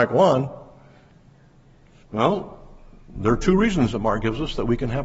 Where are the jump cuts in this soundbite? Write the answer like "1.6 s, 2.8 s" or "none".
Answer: 2.0 s